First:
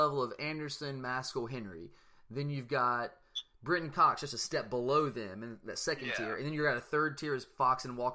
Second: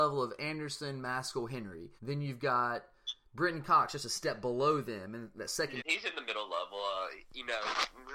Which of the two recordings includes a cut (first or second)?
second